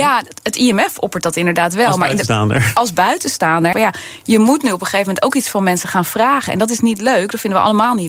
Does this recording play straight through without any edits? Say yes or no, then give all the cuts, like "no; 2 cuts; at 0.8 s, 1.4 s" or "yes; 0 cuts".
no; 1 cut; at 3.7 s